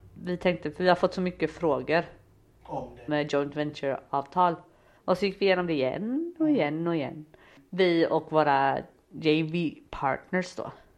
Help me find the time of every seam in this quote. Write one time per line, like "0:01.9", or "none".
0:03.1
0:05.0